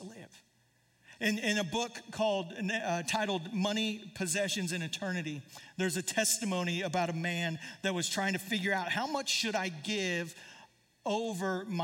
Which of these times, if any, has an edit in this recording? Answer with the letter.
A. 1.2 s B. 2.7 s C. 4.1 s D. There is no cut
A